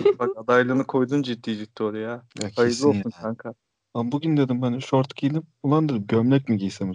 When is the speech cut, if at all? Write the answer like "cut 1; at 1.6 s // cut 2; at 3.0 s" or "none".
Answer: cut 1; at 2.3 s // cut 2; at 3.8 s